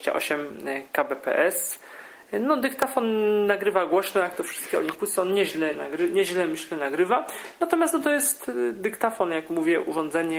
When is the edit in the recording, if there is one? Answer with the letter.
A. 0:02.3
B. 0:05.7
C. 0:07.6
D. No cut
B